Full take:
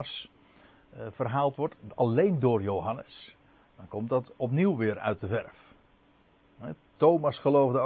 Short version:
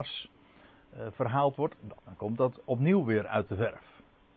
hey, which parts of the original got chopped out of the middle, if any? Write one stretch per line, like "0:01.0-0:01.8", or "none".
0:02.0-0:03.7